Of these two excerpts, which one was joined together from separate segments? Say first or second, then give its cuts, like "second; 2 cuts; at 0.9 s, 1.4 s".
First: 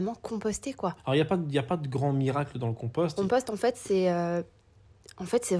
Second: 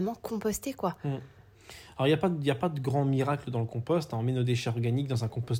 first; 2 cuts; at 1.0 s, 3.2 s